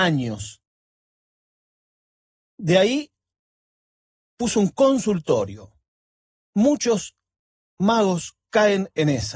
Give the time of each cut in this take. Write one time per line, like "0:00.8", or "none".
none